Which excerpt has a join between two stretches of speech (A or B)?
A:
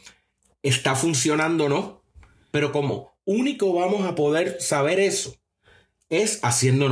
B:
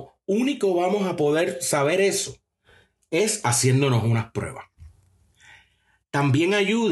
A